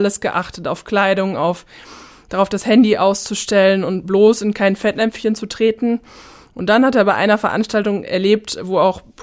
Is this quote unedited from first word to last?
yes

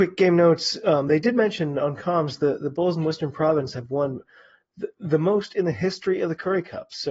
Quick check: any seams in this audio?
no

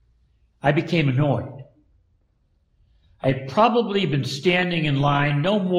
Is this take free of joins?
yes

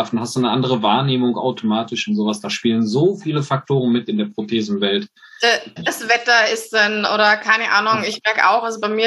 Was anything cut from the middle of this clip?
yes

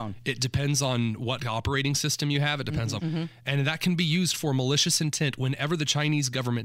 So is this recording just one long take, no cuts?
no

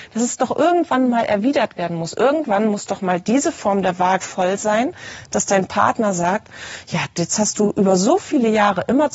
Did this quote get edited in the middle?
yes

